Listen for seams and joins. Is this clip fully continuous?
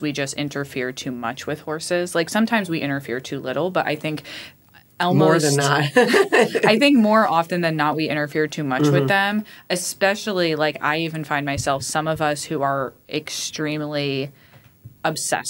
yes; 0 cuts

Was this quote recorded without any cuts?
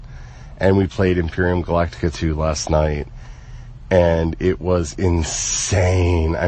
yes; 0 cuts

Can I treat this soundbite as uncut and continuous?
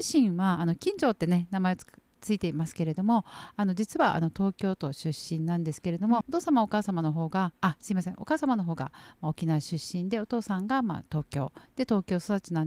no; 1 cut; at 6.2 s

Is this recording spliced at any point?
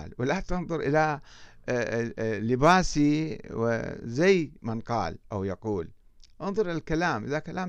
yes; 1 cut; at 4.6 s

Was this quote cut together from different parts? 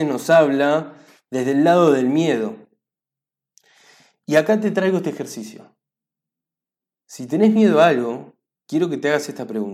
no; 0 cuts

